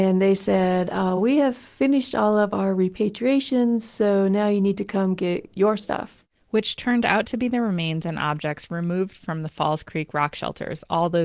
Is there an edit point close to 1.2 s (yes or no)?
no